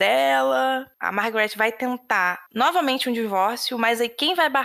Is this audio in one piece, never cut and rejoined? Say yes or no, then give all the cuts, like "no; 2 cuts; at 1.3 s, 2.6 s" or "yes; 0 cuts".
no; 2 cuts; at 0.9 s, 2.5 s